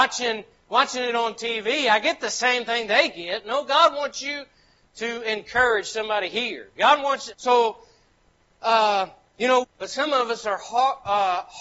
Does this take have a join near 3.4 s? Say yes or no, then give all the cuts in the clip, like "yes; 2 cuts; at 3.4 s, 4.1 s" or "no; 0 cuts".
no; 2 cuts; at 7.3 s, 9.6 s